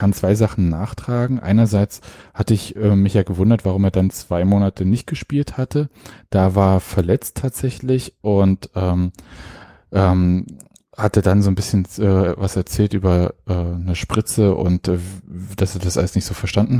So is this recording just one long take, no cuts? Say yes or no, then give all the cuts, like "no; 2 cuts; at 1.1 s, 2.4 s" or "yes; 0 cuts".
yes; 0 cuts